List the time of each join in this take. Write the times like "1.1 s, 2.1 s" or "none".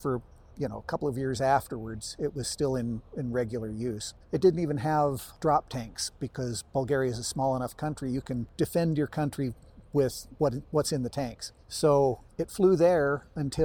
4.2 s